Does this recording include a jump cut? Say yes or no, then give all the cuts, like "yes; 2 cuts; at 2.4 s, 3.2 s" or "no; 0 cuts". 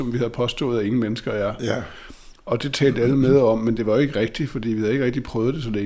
no; 0 cuts